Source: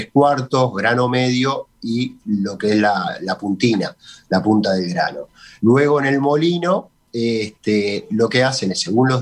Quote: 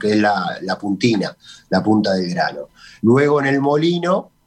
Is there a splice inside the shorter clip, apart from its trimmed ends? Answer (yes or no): no